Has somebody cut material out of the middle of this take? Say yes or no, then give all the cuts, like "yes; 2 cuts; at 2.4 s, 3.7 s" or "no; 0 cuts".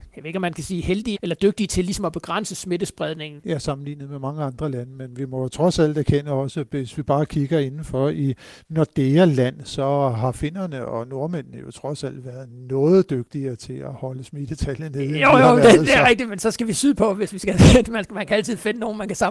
yes; 2 cuts; at 1.1 s, 3.4 s